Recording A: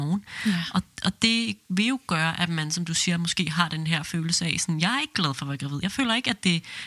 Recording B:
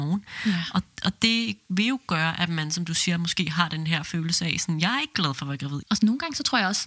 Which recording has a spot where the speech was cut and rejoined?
B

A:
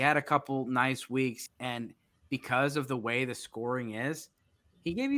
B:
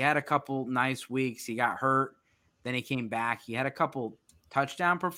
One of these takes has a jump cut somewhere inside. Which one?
A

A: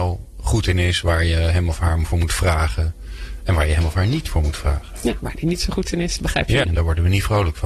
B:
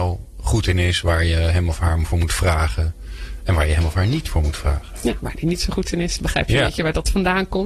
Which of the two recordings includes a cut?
A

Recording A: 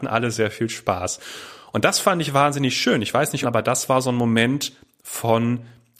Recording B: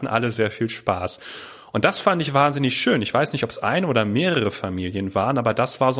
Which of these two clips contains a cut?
A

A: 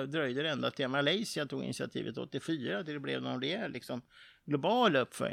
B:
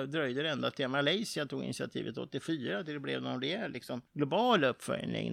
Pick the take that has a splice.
B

